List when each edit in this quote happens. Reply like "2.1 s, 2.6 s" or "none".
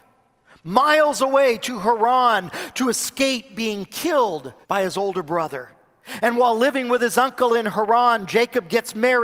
4.6 s